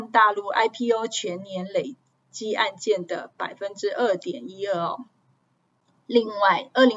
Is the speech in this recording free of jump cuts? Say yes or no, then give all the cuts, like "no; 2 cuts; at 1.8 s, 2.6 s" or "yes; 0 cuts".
yes; 0 cuts